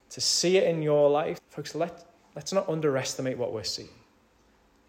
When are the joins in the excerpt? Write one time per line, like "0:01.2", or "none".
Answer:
0:01.4